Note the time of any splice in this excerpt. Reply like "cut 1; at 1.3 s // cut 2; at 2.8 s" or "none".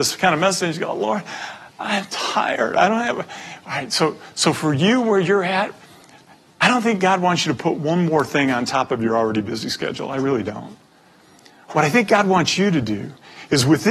none

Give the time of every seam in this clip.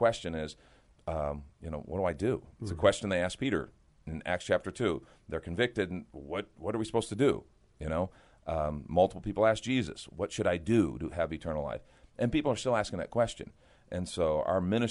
none

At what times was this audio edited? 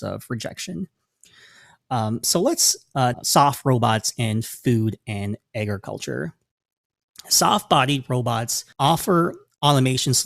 cut 1; at 3.1 s // cut 2; at 8.7 s

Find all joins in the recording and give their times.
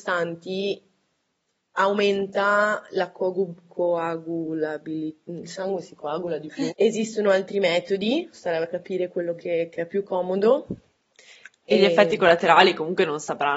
cut 1; at 6.7 s

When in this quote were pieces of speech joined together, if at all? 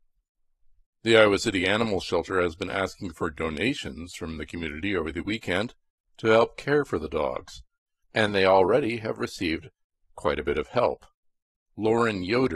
cut 1; at 11.6 s

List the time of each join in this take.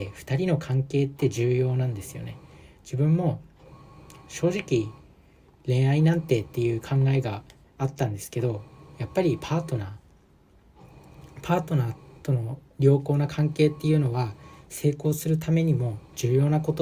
none

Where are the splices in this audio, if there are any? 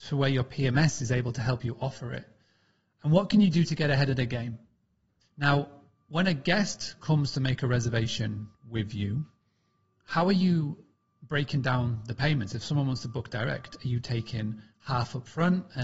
cut 1; at 5.2 s

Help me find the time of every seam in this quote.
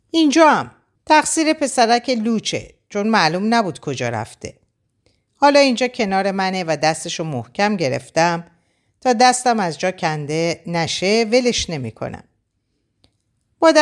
cut 1; at 1.0 s

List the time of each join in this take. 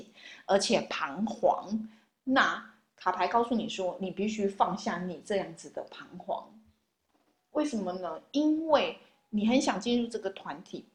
none

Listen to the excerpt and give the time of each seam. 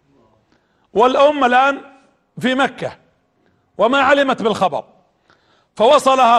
none

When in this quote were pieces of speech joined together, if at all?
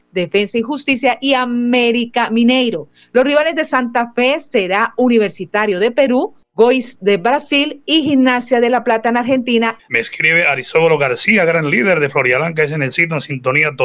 cut 1; at 9.8 s

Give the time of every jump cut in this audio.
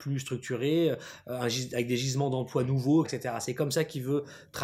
cut 1; at 3.0 s

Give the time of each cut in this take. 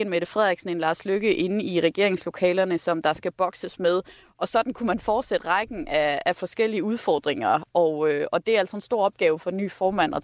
none

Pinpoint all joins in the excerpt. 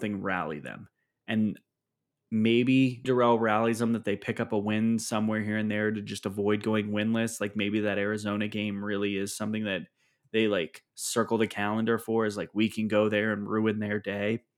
cut 1; at 3.0 s

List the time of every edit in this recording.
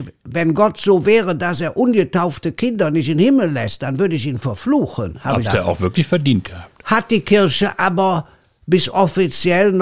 cut 1; at 5.4 s

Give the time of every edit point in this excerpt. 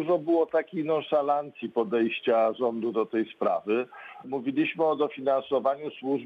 cut 1; at 4.2 s

